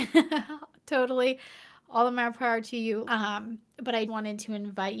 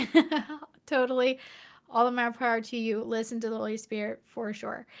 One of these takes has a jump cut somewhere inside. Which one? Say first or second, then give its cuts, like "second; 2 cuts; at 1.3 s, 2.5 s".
first; 2 cuts; at 3.0 s, 4.1 s